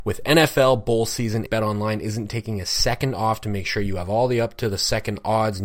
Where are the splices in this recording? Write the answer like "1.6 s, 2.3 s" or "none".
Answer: 1.5 s